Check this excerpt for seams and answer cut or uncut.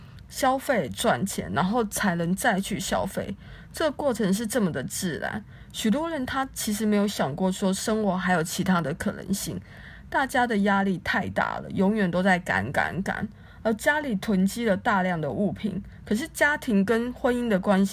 uncut